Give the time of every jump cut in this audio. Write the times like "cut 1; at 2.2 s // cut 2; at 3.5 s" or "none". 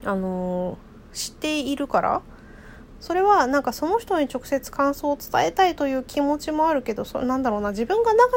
cut 1; at 3.0 s